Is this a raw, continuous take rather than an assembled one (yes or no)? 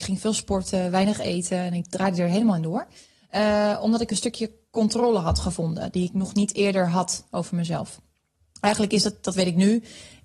yes